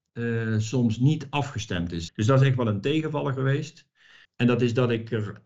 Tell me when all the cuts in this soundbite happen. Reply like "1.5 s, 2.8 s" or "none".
2.1 s, 4.2 s